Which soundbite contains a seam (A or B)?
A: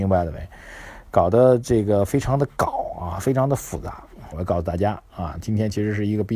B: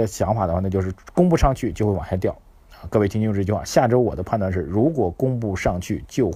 A